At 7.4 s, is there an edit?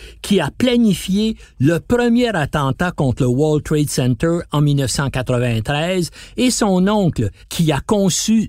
yes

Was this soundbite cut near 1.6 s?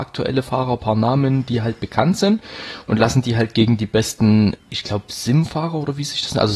no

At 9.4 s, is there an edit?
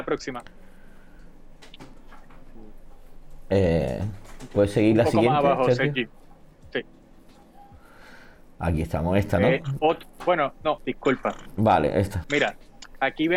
no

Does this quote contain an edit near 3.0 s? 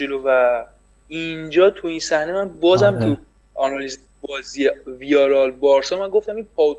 yes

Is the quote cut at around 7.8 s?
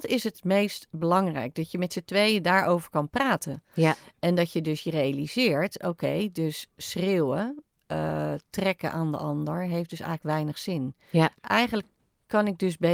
no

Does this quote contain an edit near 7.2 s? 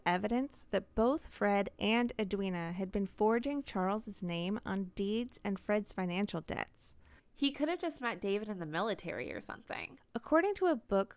yes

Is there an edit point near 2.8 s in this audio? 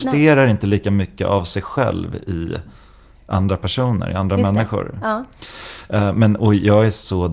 no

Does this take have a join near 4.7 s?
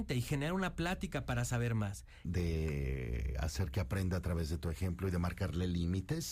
no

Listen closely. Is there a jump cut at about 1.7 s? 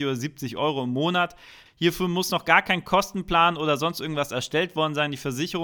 yes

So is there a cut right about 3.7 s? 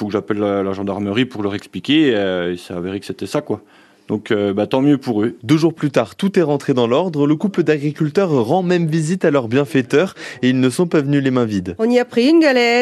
no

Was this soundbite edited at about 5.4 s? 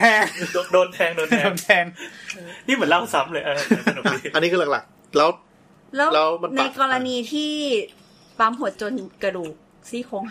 no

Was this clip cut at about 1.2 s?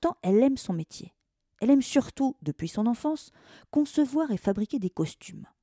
no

